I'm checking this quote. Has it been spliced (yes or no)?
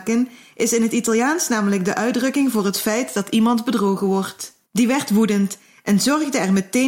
yes